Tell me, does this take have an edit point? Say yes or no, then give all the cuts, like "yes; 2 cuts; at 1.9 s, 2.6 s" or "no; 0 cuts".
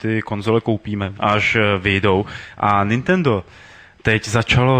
yes; 2 cuts; at 1.1 s, 2.5 s